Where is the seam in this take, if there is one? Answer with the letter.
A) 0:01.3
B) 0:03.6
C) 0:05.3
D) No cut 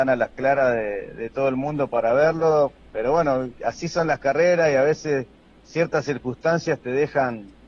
B